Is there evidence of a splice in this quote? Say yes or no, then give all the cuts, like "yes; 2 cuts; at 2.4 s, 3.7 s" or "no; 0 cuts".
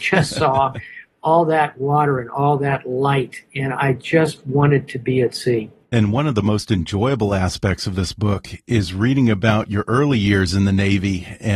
yes; 1 cut; at 5.8 s